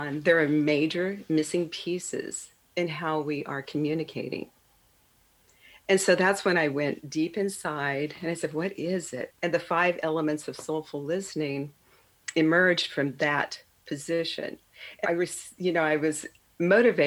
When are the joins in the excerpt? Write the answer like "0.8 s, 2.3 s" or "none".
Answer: 9.3 s, 15.0 s